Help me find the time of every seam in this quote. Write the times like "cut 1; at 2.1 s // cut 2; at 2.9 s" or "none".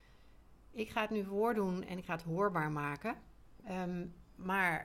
cut 1; at 3.6 s